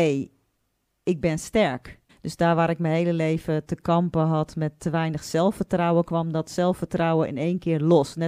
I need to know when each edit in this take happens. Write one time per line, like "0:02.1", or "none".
0:02.1